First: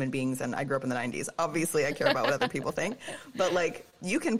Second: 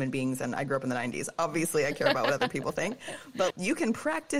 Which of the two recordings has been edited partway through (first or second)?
second